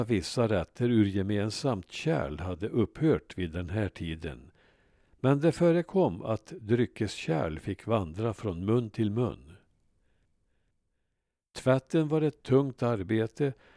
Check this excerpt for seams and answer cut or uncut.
uncut